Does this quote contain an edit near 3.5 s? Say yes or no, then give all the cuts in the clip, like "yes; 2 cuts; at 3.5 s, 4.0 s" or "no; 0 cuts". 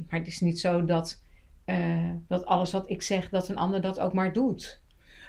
no; 1 cut; at 2.3 s